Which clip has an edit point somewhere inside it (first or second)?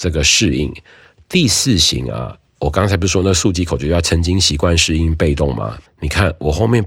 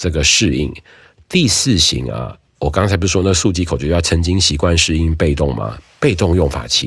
first